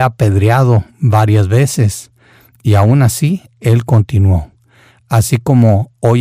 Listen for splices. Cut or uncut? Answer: uncut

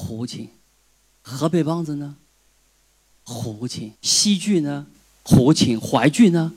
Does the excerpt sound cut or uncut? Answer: cut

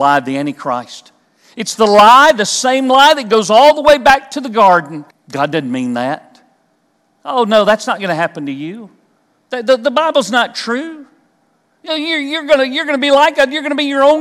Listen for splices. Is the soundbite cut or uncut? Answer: cut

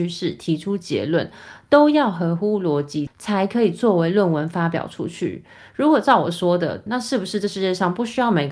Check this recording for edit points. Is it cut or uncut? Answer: cut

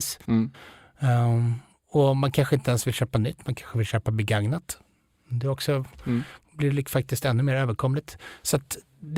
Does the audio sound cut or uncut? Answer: uncut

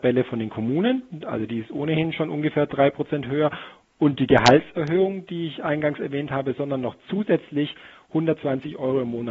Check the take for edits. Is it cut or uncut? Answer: uncut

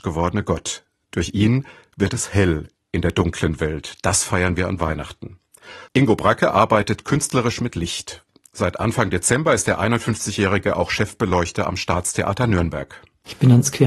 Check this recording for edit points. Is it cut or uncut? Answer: uncut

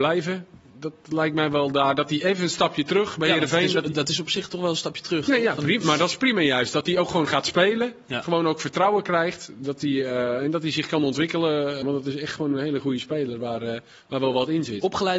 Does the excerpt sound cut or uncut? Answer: cut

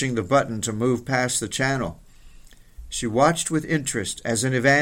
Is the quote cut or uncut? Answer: uncut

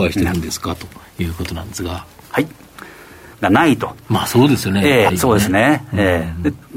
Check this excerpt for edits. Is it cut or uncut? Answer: cut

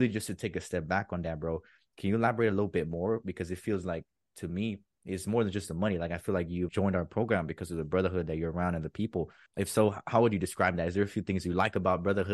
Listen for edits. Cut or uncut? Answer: cut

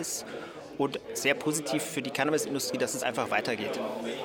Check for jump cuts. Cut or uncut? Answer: uncut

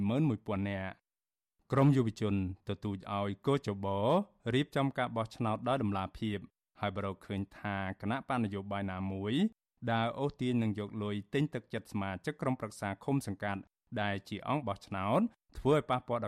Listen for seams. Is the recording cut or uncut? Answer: uncut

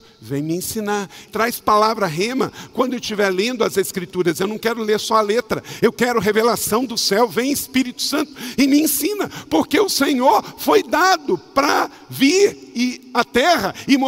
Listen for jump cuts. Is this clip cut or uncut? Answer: cut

